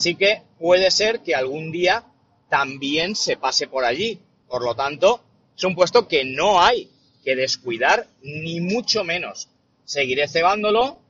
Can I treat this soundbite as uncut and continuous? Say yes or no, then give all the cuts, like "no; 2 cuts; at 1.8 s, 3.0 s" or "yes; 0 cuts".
yes; 0 cuts